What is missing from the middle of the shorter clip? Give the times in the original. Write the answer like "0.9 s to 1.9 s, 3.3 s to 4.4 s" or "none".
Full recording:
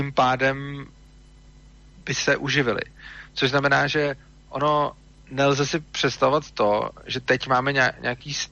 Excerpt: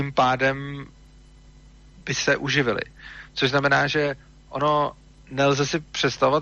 none

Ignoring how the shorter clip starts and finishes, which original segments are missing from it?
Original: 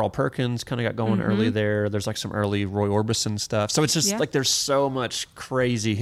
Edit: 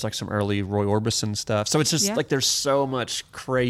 none

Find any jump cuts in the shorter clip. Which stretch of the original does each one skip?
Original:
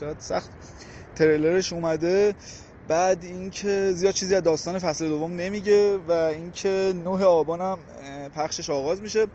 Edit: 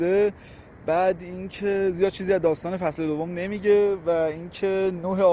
none

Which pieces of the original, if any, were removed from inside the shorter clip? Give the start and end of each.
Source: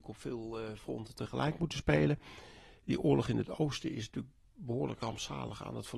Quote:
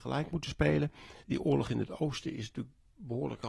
2.5 s to 2.8 s

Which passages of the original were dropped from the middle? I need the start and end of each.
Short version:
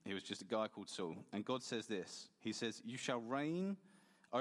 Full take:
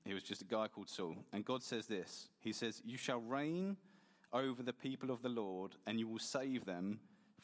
none

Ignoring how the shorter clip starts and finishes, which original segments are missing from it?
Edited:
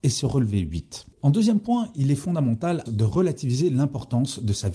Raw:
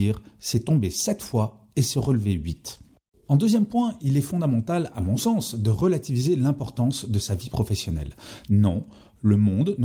2.9 s to 3.2 s, 4.9 s to 5.5 s

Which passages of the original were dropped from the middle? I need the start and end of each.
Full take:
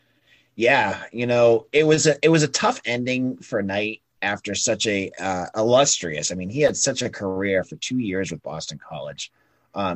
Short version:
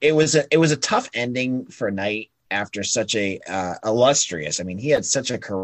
none

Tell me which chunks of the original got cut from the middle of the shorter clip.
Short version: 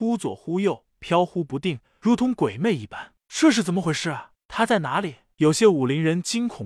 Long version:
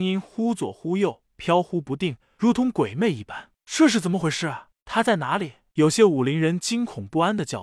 none

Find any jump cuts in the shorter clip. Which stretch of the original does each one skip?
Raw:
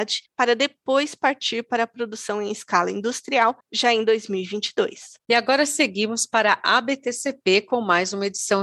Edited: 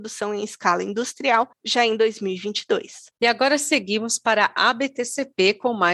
none

